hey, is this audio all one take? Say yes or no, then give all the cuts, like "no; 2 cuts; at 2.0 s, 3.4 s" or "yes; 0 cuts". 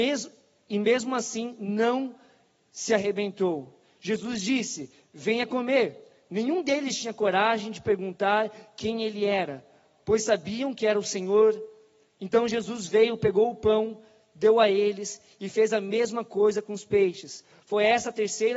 yes; 0 cuts